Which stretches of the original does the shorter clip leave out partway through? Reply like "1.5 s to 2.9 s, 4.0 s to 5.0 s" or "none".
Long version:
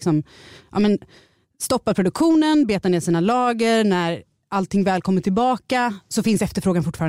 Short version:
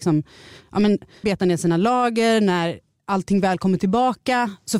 1.2 s to 2.7 s